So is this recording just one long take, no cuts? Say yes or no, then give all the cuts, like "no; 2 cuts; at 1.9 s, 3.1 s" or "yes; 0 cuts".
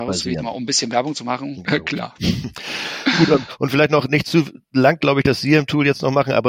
no; 1 cut; at 1.6 s